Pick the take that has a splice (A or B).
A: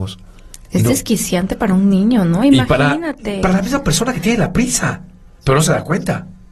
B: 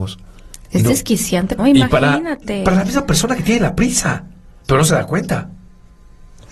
B